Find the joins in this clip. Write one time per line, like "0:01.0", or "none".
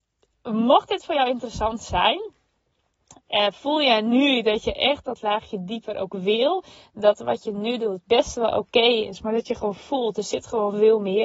none

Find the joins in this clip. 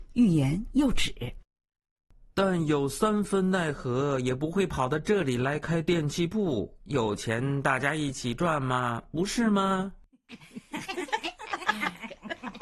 none

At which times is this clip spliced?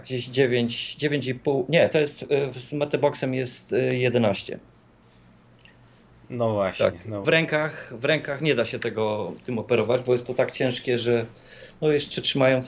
0:07.2

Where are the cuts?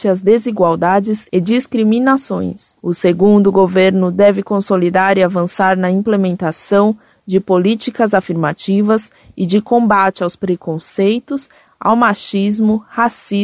0:02.8
0:11.7

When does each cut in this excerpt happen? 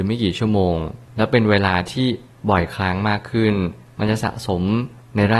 none

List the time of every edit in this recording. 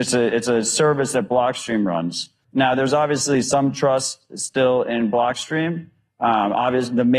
0:02.4

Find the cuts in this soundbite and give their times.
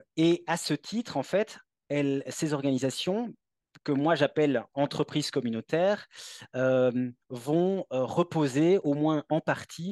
0:07.2

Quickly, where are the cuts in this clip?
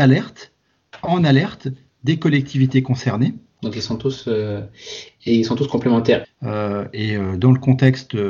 0:03.6
0:06.2

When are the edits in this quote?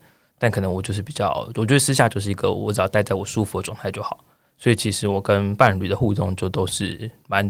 none

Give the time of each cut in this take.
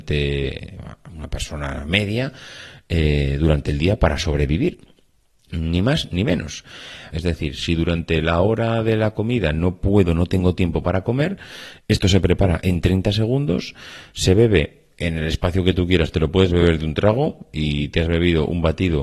0:07.1

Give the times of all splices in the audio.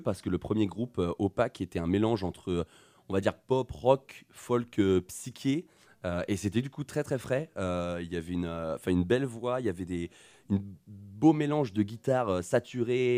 none

